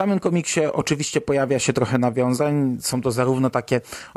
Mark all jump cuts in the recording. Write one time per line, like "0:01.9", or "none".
none